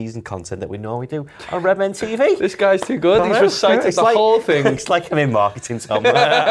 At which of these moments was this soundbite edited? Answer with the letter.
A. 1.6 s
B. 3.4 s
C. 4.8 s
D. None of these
D